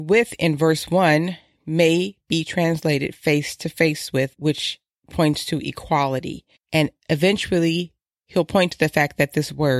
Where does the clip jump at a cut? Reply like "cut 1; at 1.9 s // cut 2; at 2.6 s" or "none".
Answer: cut 1; at 4.3 s // cut 2; at 6.6 s